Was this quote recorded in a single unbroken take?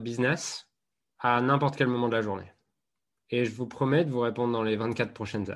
yes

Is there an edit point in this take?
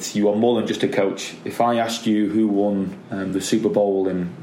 no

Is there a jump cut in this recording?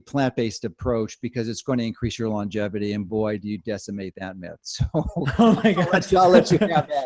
no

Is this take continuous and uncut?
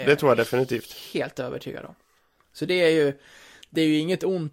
yes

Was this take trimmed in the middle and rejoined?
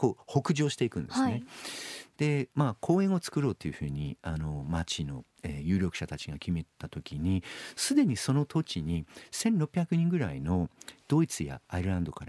no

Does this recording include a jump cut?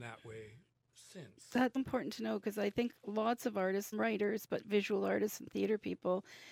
yes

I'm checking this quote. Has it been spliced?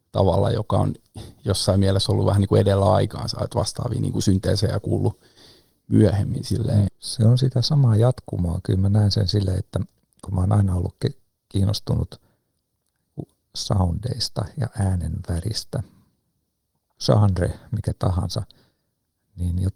yes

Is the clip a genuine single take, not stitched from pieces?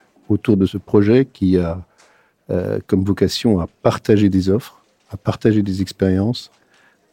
yes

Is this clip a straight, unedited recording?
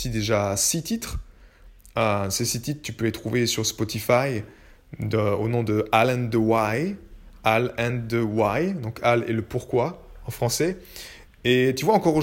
no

